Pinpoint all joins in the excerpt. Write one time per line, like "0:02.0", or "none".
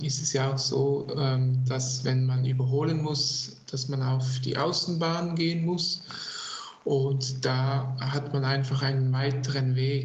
none